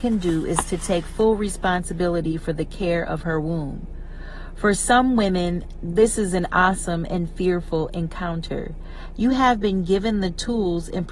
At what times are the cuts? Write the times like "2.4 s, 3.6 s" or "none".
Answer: 9.1 s